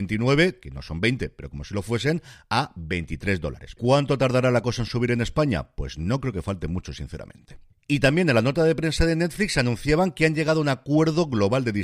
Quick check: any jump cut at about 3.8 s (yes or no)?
yes